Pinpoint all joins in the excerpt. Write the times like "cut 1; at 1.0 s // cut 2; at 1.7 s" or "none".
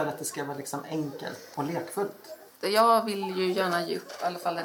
cut 1; at 1.5 s